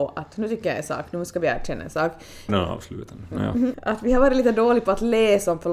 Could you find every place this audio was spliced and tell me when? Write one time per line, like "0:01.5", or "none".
0:02.5
0:03.7